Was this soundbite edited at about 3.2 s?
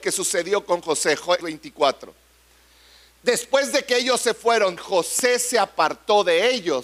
no; 2 cuts; at 1.4 s, 4.8 s

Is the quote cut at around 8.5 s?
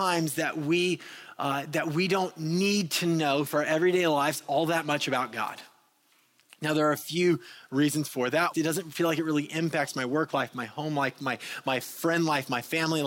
yes; 1 cut; at 8.5 s

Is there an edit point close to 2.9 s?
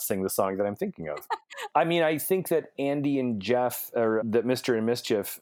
no; 2 cuts; at 1.7 s, 4.2 s

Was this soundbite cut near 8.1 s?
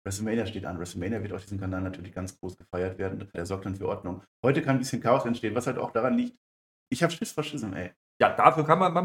no; 2 cuts; at 3.3 s, 6.9 s

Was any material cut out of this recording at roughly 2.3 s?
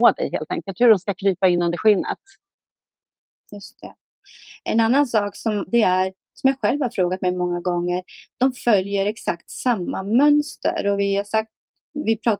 no; 1 cut; at 5.7 s

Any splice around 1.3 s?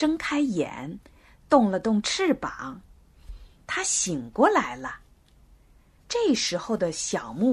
no; 1 cut; at 6.0 s

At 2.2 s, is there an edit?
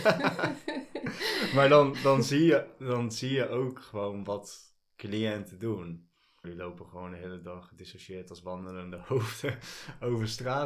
no; 1 cut; at 6.4 s

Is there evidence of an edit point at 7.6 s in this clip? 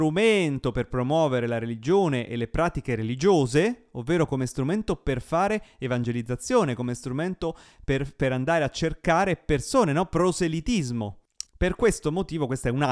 no; 1 cut; at 11.5 s

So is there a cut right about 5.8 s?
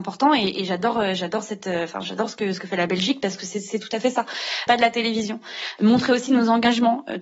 yes; 2 cuts; at 4.7 s, 5.8 s

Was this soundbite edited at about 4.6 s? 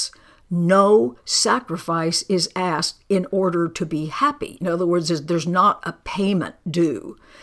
no; 0 cuts

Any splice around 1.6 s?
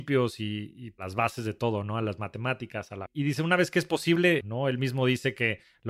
no; 2 cuts; at 3.1 s, 4.4 s

